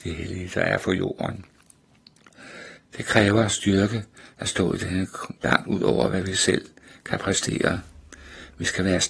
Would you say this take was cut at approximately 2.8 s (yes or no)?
yes